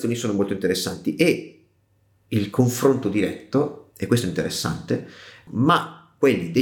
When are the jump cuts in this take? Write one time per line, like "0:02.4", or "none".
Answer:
0:05.5

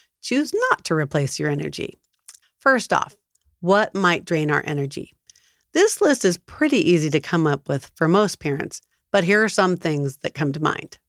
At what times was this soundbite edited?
0:02.4

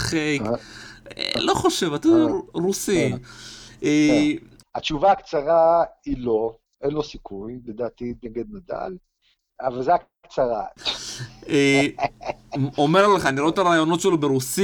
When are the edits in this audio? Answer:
0:04.6
0:10.8

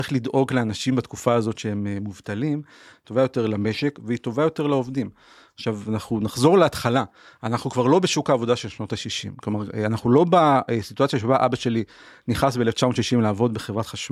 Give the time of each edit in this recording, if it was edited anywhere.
0:02.9

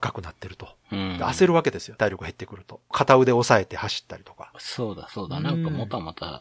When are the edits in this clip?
0:02.0

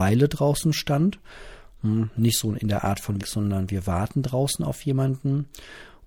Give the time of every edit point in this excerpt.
0:03.2

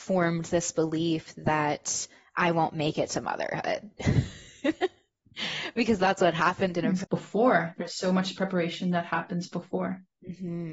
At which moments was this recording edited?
0:07.0

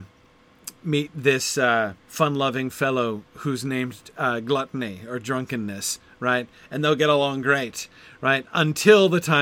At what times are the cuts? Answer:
0:02.0

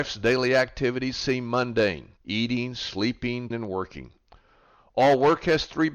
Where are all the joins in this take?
0:02.2
0:03.5

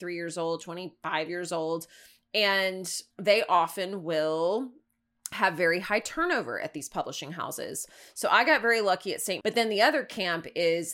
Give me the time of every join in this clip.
0:03.1
0:09.4

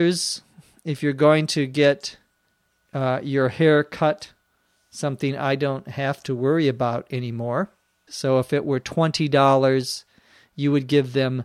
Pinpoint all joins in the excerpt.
0:08.1

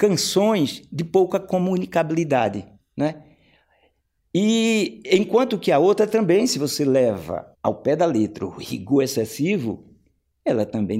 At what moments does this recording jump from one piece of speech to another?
0:02.8
0:07.5

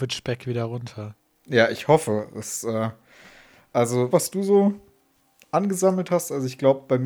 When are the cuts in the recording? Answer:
0:04.1

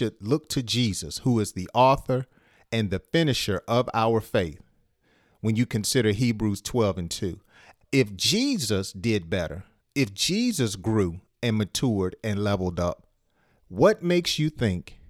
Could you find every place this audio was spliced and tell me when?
0:07.8

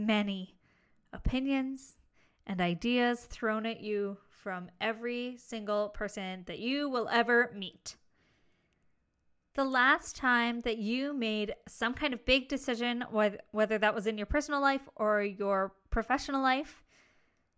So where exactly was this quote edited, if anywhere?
0:09.5

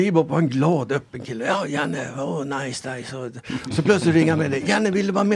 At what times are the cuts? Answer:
none

